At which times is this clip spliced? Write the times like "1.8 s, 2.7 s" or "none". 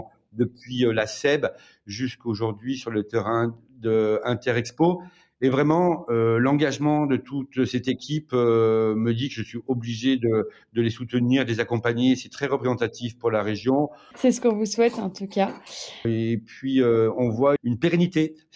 14.1 s, 16.0 s, 17.6 s